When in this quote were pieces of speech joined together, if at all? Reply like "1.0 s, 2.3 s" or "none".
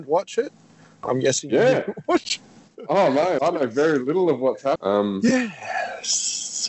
3.4 s, 4.8 s